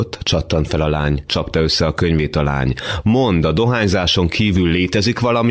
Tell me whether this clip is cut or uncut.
cut